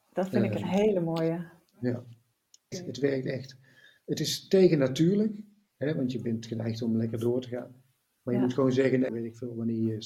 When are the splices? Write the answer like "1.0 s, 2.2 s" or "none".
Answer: 2.7 s, 9.1 s